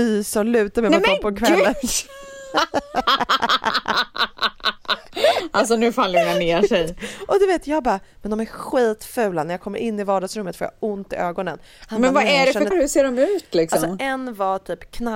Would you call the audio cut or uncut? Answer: cut